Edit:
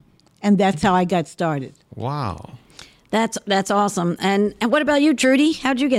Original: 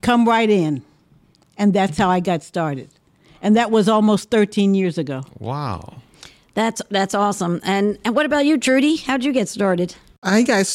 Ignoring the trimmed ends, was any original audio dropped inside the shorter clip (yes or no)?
yes